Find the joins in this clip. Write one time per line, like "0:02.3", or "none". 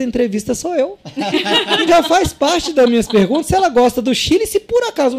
0:01.9